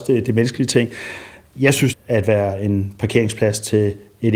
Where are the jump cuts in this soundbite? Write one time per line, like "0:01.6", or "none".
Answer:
0:01.9